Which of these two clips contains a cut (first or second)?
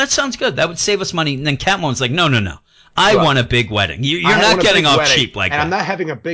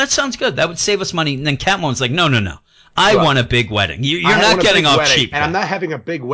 second